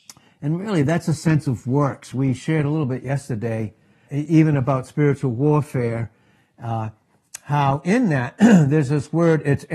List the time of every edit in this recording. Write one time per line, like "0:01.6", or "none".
0:04.1